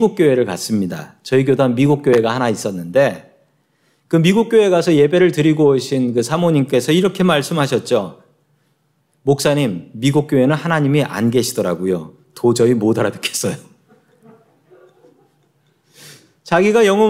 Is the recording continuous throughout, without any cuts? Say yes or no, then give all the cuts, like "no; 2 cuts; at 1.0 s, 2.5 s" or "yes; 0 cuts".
yes; 0 cuts